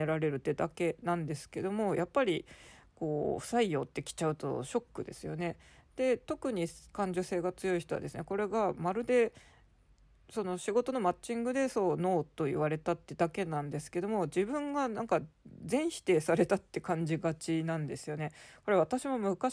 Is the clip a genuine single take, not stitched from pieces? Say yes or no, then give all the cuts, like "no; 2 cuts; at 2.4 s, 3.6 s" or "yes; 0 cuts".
yes; 0 cuts